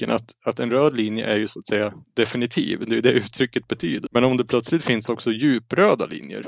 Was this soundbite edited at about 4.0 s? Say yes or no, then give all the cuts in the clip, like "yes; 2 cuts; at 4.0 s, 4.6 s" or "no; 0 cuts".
yes; 1 cut; at 4.0 s